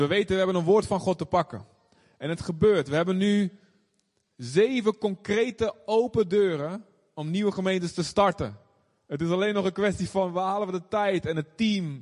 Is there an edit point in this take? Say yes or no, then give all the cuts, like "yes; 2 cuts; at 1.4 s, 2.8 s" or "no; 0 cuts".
no; 0 cuts